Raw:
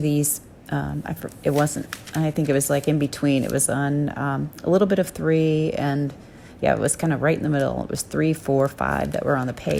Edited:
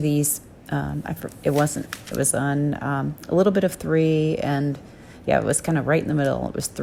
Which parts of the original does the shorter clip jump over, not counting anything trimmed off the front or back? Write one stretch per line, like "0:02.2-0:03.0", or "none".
0:02.1-0:03.5